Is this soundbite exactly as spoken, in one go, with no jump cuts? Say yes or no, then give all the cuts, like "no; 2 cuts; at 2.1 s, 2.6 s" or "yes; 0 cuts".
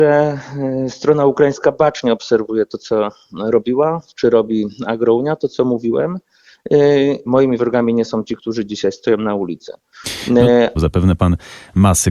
no; 2 cuts; at 7.3 s, 10.8 s